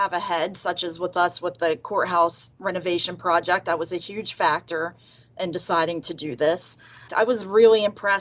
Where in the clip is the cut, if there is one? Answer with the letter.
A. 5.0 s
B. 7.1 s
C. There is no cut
B